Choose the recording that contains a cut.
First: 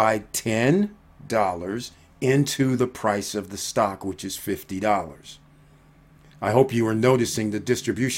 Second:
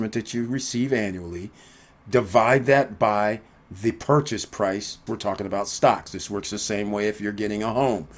second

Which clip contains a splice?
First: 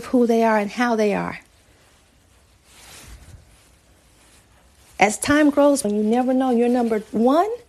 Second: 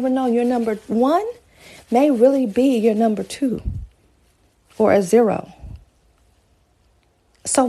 first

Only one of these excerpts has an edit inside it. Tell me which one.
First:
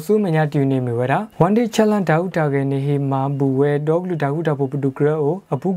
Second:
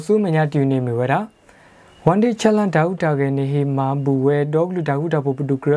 first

